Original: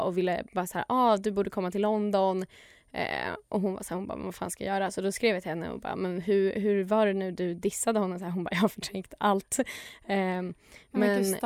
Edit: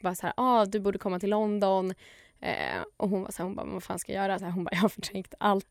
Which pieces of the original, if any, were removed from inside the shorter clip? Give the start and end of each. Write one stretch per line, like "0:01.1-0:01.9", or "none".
0:04.9-0:08.2